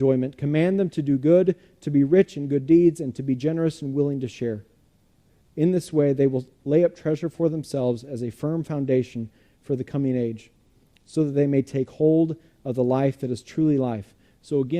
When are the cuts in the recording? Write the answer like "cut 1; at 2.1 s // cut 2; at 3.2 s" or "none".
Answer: none